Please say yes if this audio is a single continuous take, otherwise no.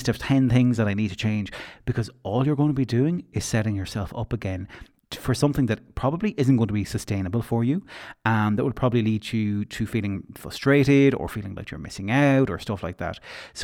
yes